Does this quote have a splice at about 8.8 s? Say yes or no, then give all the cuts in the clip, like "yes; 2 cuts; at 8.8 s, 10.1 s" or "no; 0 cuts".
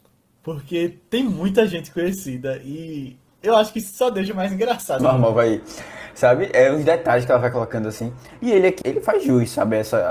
yes; 2 cuts; at 5.0 s, 8.8 s